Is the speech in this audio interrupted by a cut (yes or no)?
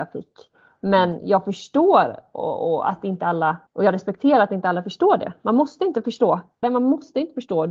yes